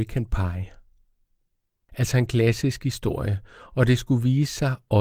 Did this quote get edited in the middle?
yes; 1 cut; at 1.8 s

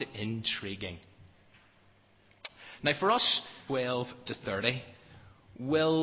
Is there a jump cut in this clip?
yes; 1 cut; at 3.7 s

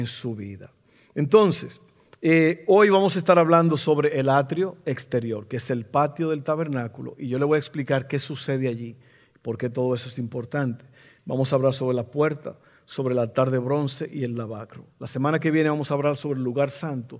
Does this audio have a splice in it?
no; 0 cuts

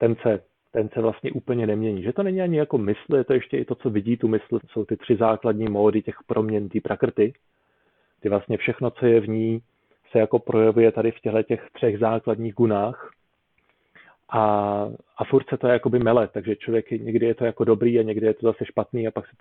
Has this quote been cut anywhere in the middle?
yes; 2 cuts; at 4.6 s, 11.7 s

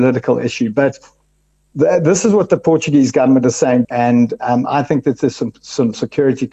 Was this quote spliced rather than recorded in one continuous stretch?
yes; 1 cut; at 3.8 s

